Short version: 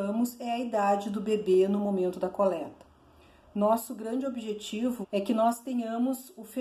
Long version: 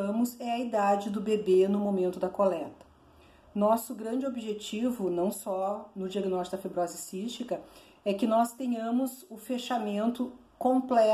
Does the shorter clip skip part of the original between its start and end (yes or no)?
yes